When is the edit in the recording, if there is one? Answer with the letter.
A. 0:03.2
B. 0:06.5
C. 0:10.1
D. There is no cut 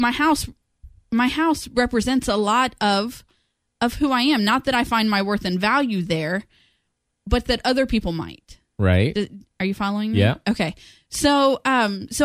D